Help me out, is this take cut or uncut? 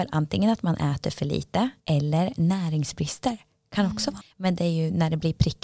cut